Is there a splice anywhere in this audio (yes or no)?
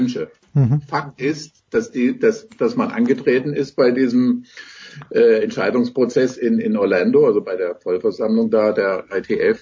no